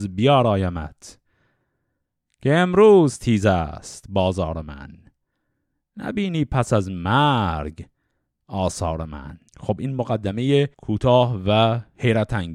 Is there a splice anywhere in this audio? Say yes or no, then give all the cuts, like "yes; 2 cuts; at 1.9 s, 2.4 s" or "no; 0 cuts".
yes; 2 cuts; at 9.5 s, 10.7 s